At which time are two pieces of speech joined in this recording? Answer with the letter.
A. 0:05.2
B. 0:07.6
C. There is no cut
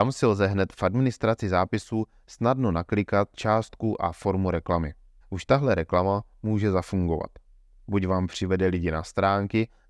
A